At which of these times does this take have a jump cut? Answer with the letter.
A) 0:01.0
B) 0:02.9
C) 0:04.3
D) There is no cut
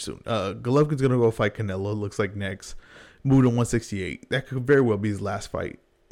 D